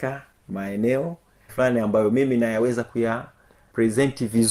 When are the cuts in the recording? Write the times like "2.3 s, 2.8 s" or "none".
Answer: 1.5 s

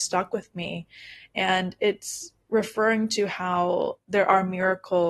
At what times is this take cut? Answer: none

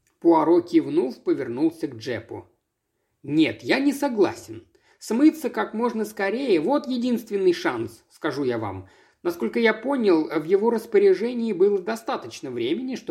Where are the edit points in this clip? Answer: none

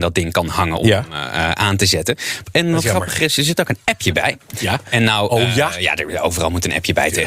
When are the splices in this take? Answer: 2.4 s

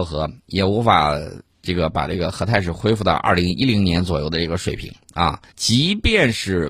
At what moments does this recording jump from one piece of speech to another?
5.5 s

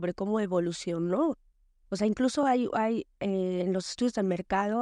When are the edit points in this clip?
none

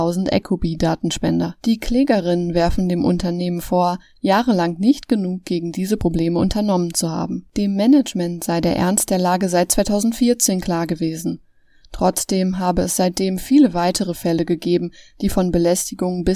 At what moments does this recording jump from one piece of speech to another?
1.6 s

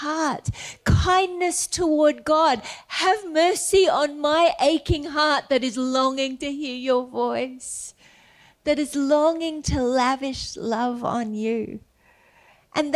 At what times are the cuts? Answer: none

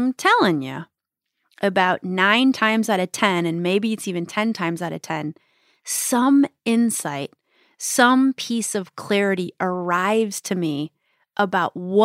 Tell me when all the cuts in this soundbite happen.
none

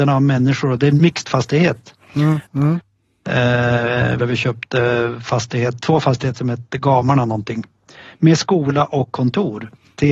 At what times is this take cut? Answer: 2.4 s, 4.2 s

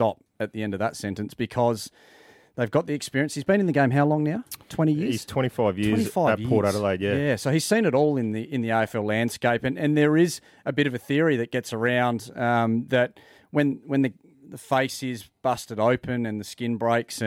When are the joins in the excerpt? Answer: none

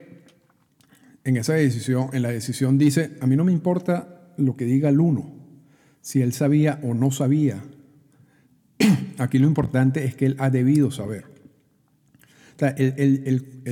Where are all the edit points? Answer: none

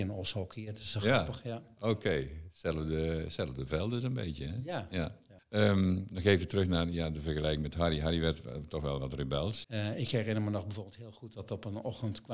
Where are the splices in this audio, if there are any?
5.4 s, 9.6 s

